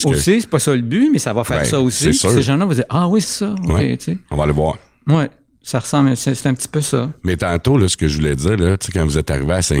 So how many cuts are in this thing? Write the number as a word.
one